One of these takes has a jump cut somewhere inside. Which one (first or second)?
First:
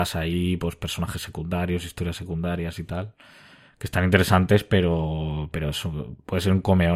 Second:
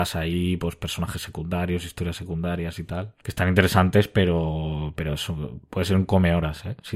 second